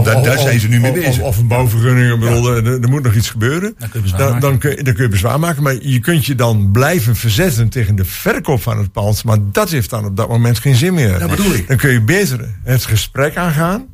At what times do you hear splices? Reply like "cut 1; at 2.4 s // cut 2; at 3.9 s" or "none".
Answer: none